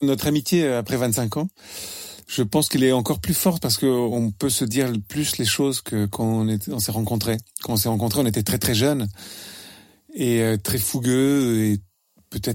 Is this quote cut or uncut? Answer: uncut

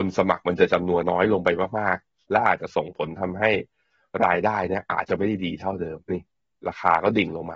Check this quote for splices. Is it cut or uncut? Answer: cut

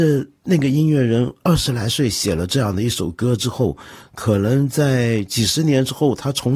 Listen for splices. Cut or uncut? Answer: uncut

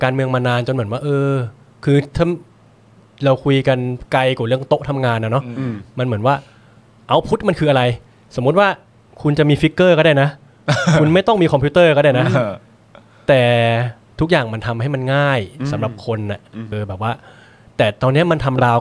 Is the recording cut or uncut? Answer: cut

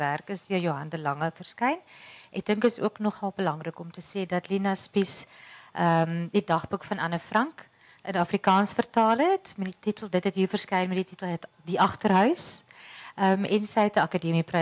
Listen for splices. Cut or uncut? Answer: uncut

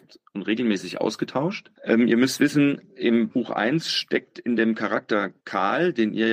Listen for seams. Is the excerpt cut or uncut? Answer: cut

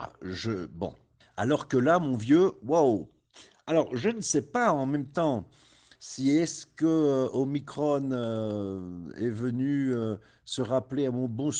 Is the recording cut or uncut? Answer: cut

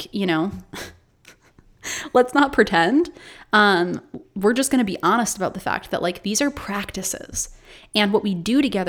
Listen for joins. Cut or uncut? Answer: uncut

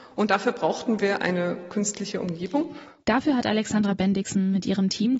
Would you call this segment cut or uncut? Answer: uncut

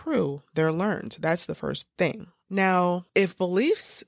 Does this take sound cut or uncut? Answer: uncut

